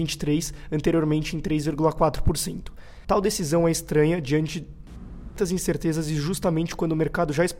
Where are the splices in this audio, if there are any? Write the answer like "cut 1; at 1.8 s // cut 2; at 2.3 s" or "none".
cut 1; at 3.0 s